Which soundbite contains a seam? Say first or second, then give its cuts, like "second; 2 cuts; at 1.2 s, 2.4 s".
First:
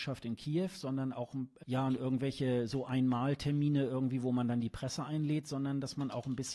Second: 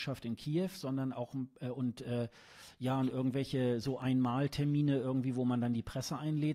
first; 1 cut; at 1.6 s